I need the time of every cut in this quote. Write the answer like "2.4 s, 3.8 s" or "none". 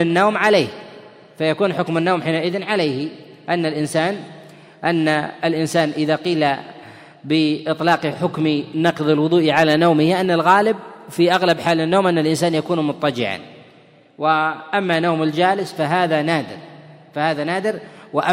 none